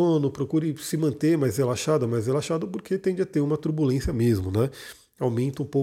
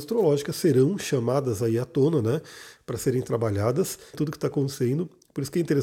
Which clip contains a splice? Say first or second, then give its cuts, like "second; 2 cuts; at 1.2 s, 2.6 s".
second; 1 cut; at 4.1 s